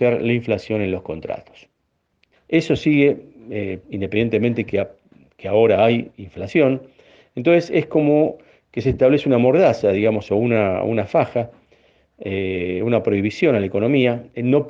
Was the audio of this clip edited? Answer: yes; 2 cuts; at 2.3 s, 3.8 s

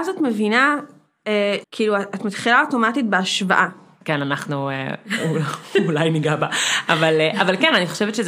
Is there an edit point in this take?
yes; 2 cuts; at 1.6 s, 4.0 s

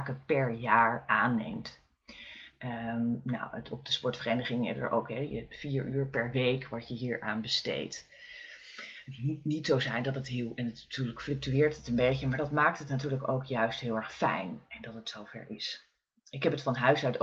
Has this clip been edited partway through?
no; 0 cuts

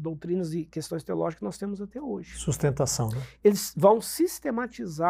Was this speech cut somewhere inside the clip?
no; 0 cuts

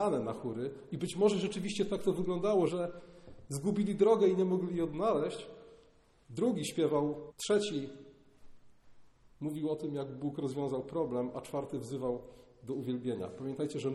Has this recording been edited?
yes; 2 cuts; at 2.7 s, 7.3 s

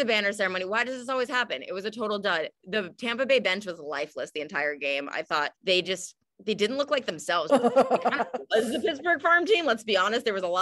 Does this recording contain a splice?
yes; 2 cuts; at 5.6 s, 7.5 s

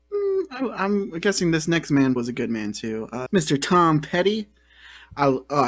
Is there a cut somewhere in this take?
yes; 2 cuts; at 2.2 s, 3.3 s

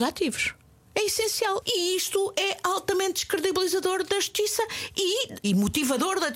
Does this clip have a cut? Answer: yes; 2 cuts; at 1.6 s, 5.4 s

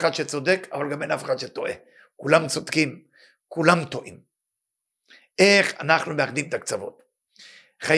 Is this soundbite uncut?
yes; 0 cuts

